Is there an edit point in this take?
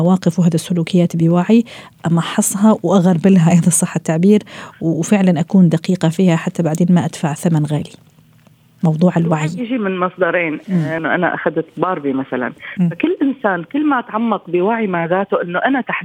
yes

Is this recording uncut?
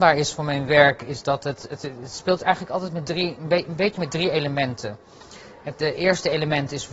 yes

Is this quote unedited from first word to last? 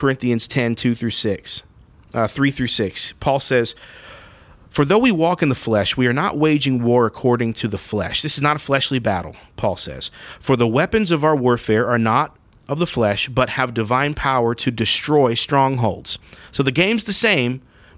yes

